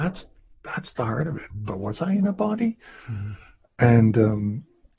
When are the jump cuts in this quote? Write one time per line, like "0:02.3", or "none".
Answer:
0:01.5

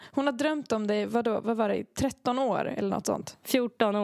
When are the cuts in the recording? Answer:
none

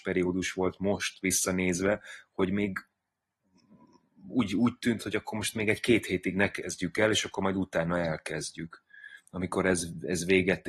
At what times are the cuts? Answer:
none

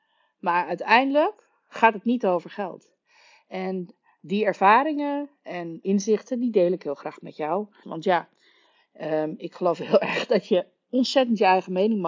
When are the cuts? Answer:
0:05.8
0:07.8

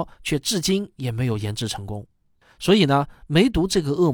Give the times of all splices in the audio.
none

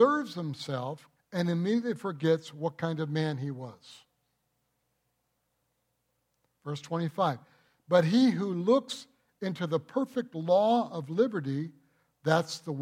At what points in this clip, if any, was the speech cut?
0:01.2

